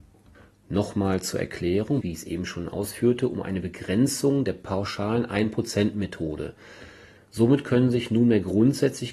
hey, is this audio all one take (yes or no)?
no